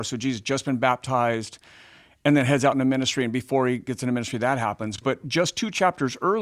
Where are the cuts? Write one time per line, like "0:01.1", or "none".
none